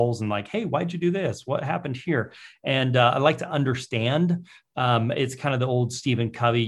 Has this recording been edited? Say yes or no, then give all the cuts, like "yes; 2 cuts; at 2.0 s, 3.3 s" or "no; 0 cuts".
no; 0 cuts